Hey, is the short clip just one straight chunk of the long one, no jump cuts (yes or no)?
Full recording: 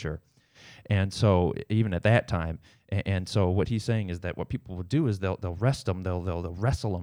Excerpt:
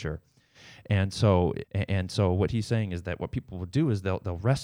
no